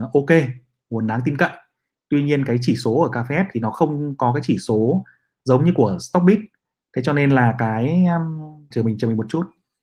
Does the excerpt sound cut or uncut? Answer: cut